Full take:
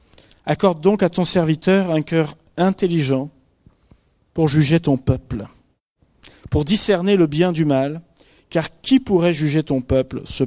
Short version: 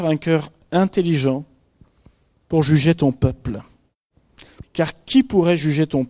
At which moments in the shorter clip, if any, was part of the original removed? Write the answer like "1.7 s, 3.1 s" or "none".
4.6 s